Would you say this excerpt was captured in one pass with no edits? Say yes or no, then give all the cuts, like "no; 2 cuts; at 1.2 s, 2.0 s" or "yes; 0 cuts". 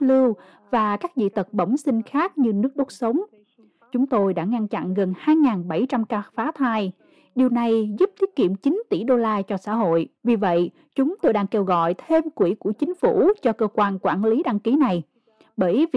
no; 1 cut; at 10.2 s